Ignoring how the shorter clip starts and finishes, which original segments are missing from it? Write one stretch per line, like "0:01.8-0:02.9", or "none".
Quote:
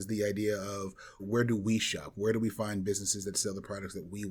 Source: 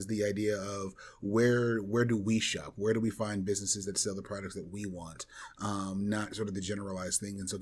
0:01.2-0:01.8